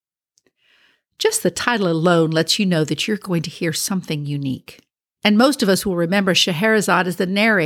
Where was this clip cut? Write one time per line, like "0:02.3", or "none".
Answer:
0:05.2